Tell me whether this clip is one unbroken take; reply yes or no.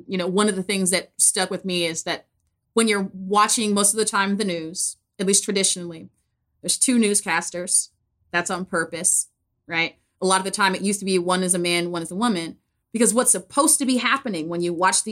yes